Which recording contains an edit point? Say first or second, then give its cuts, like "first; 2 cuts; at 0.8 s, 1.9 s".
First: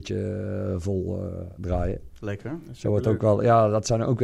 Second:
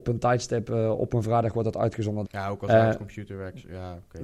second; 1 cut; at 2.2 s